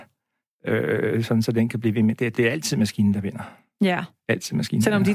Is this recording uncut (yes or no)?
yes